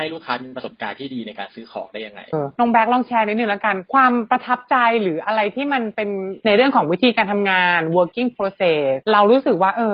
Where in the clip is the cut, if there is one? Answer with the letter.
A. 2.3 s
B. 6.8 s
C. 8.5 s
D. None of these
A